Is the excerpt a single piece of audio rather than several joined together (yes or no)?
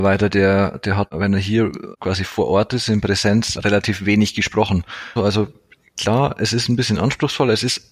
no